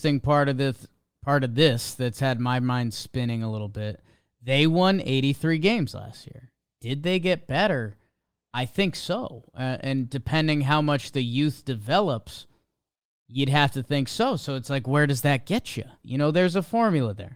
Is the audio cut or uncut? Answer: cut